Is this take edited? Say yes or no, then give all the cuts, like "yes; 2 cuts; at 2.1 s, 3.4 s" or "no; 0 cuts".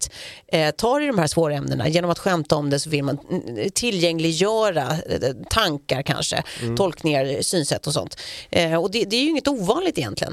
no; 0 cuts